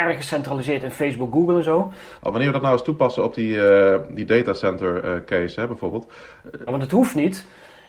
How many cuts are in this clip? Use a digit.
2